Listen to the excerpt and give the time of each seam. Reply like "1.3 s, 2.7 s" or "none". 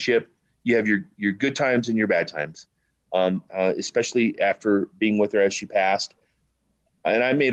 3.5 s